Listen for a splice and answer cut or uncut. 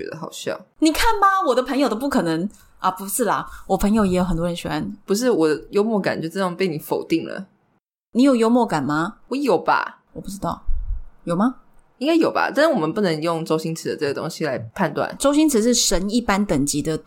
uncut